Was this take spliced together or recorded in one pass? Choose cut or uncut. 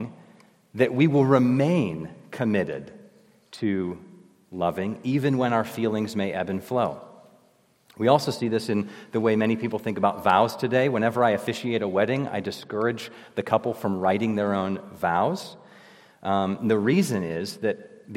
uncut